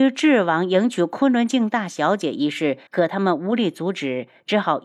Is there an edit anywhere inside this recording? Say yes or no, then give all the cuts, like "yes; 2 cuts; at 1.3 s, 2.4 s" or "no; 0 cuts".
yes; 1 cut; at 2.9 s